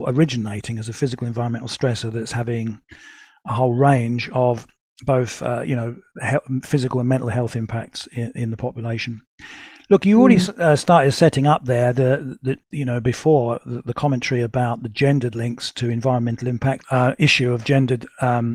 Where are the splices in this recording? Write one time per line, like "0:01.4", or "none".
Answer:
0:16.8